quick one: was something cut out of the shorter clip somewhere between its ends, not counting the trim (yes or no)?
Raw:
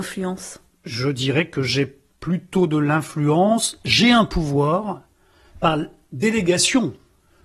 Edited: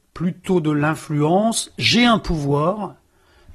no